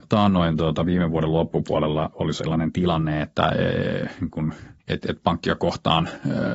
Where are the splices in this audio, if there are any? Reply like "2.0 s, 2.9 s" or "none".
4.8 s